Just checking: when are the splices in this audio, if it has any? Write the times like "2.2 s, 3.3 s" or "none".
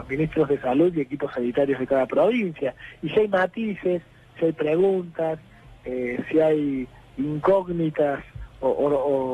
none